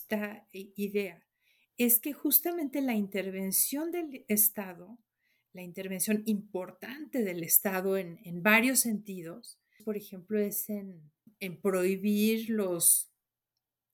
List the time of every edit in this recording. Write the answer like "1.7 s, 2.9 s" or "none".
9.8 s, 11.3 s